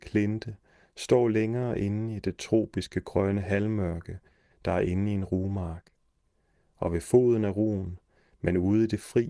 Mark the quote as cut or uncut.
uncut